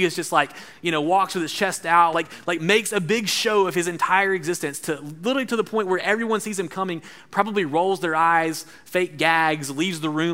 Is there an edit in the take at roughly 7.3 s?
no; 1 cut; at 2.1 s

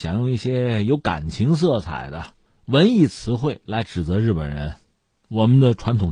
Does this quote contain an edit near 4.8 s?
no; 0 cuts

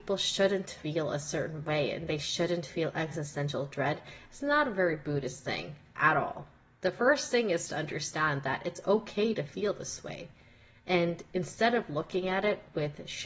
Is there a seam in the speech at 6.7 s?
no; 0 cuts

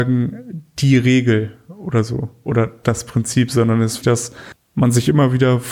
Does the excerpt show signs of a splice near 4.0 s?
yes; 1 cut; at 4.0 s

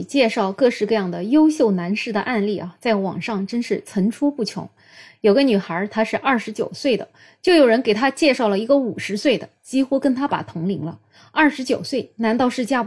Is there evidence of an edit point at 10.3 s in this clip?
yes; 1 cut; at 10.3 s

